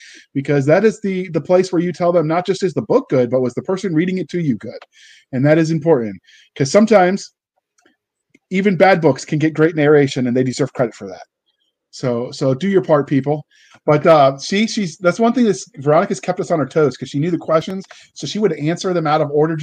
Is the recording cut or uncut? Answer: cut